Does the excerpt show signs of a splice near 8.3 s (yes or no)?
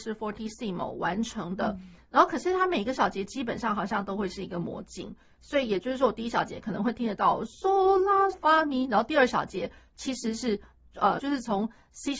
yes